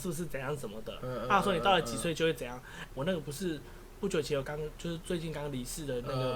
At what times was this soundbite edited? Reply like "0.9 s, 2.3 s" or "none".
2.9 s, 4.4 s